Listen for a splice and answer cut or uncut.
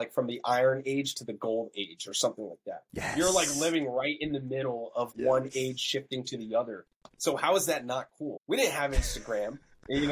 cut